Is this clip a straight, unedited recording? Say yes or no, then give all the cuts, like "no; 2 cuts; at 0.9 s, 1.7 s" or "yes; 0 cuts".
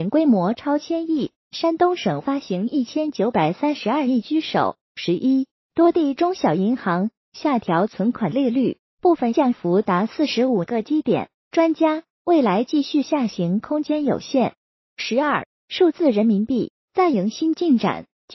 yes; 0 cuts